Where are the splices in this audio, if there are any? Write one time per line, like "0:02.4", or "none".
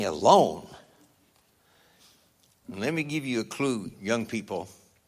0:02.6
0:03.9